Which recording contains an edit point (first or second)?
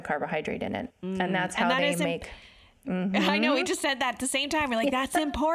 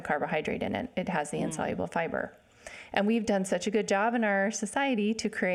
first